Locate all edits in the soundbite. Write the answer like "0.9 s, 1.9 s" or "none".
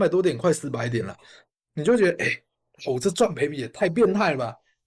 none